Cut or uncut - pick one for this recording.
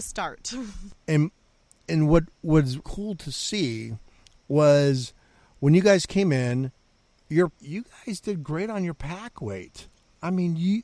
cut